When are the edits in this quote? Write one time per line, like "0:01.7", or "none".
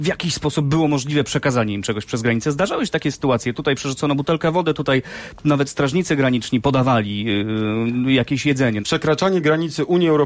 0:08.8